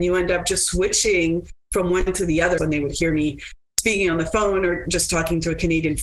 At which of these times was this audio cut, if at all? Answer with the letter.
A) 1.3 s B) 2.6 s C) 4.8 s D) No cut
B